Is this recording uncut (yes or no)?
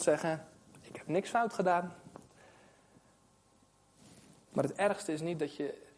yes